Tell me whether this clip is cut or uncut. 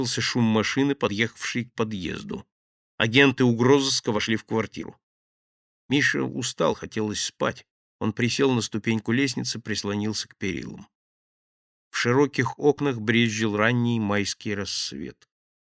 cut